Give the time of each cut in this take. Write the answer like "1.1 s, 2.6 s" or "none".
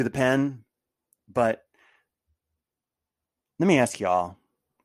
1.2 s